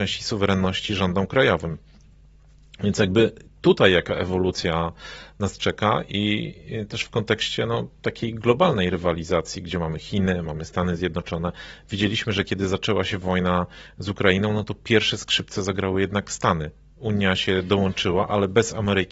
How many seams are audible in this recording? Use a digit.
0